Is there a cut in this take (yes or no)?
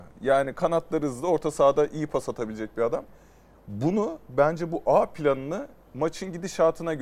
no